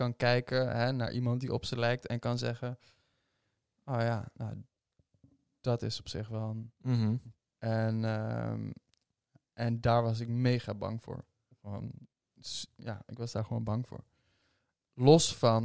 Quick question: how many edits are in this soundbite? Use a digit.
1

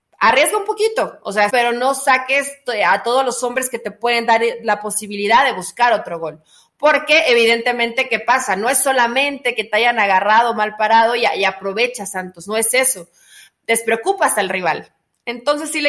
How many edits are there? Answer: 1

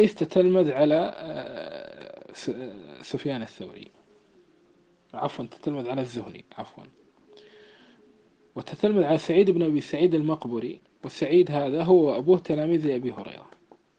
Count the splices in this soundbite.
0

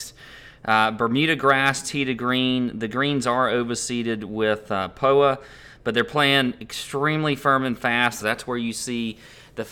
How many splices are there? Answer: 1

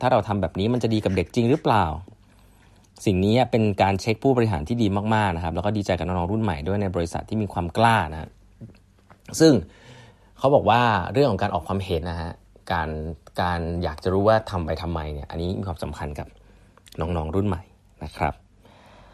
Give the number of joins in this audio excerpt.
1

